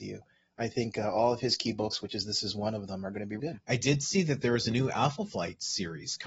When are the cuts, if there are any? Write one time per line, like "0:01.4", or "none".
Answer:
0:03.4